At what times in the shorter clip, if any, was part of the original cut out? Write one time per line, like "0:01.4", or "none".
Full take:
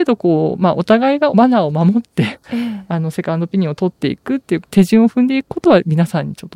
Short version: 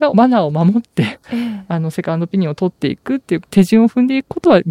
none